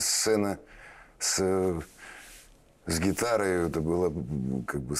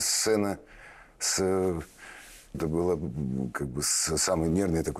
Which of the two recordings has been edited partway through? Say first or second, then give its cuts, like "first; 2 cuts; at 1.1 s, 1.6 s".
second; 1 cut; at 2.5 s